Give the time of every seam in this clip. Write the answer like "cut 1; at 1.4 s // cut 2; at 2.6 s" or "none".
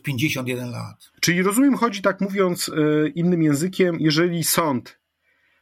cut 1; at 1.1 s